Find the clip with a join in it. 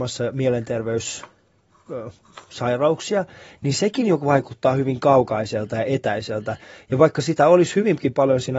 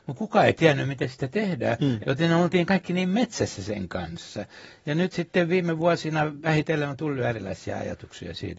second; 1 cut; at 2.0 s

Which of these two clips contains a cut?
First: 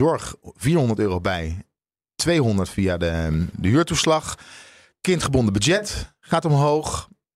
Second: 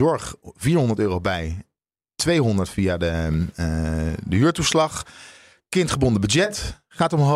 first; 1 cut; at 3.5 s

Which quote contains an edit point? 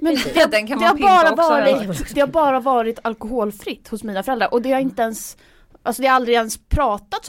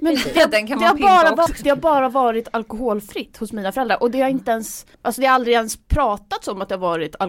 second; 2 cuts; at 1.5 s, 4.9 s

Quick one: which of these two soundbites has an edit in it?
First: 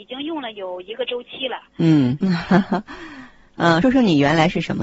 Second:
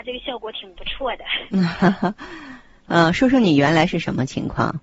first; 2 cuts; at 2.2 s, 3.8 s

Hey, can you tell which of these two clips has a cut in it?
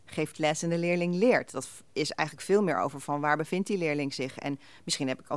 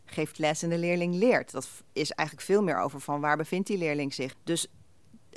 second; 1 cut; at 4.3 s

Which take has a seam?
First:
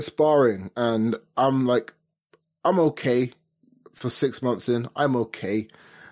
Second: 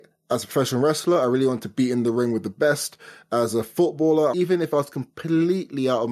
second; 1 cut; at 4.3 s

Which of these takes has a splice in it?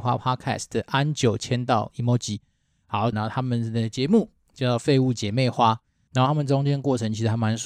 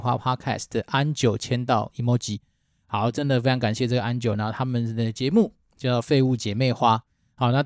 first; 2 cuts; at 3.1 s, 6.1 s

